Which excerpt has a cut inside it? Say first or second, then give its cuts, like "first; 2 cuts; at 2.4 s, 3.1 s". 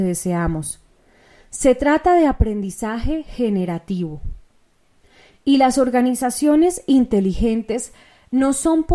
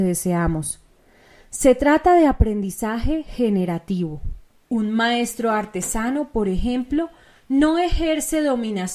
second; 1 cut; at 4.6 s